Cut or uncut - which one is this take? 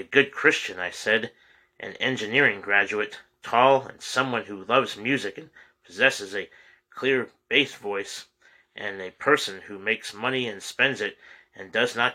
uncut